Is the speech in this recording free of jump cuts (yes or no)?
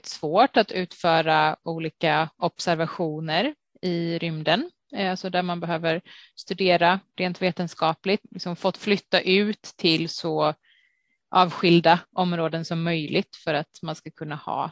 no